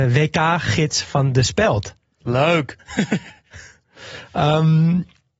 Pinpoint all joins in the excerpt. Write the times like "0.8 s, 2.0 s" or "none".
2.8 s